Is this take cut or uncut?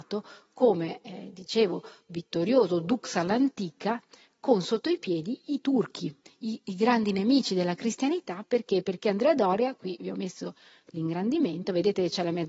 uncut